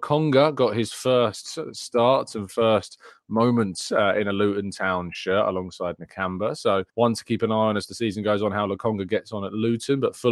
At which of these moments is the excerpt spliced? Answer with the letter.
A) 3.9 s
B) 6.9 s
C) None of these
B